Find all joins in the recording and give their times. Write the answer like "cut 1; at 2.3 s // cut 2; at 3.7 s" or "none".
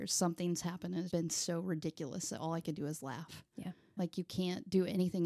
cut 1; at 1.1 s // cut 2; at 4.0 s